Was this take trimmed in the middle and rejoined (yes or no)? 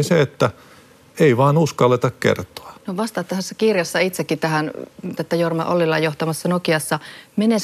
yes